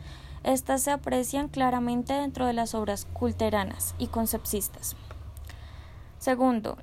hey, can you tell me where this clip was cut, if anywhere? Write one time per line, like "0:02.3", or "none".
none